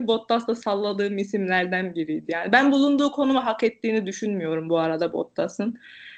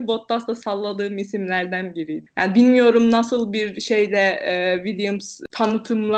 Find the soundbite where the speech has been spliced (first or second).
second